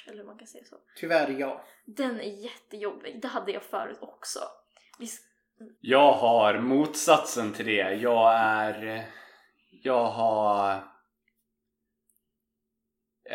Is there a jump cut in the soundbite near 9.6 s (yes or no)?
no